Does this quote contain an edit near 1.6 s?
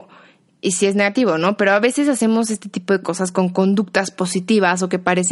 no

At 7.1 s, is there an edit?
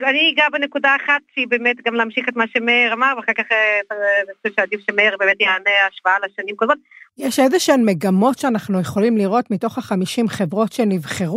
yes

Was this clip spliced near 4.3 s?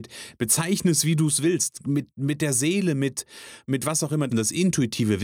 yes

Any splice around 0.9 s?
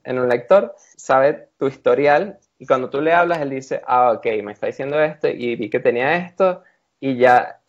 yes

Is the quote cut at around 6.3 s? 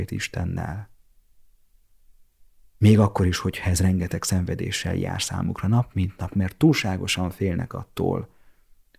yes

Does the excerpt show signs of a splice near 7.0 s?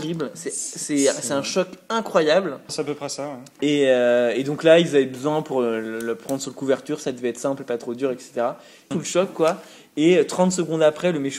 no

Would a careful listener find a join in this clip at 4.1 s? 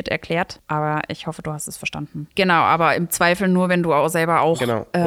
no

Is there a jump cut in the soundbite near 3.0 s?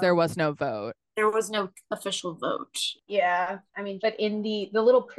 yes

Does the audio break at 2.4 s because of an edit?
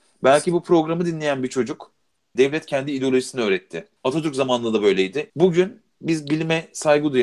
yes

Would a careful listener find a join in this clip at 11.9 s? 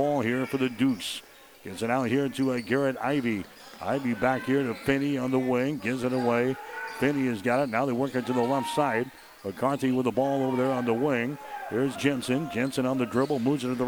yes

